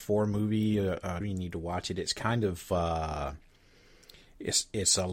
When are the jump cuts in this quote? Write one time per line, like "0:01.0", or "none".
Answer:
0:01.2